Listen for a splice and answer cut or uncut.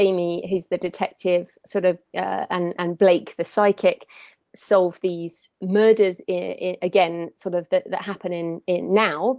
uncut